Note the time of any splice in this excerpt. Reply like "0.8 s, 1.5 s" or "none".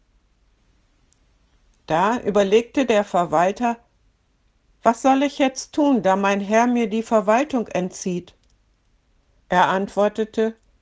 9.4 s